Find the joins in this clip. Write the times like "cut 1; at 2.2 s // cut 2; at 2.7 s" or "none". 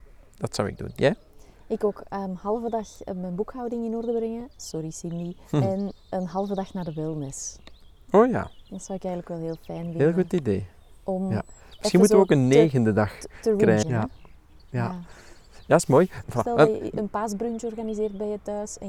cut 1; at 5.4 s // cut 2; at 13.8 s // cut 3; at 16.2 s